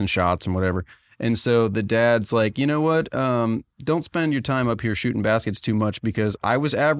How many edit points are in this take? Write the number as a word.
zero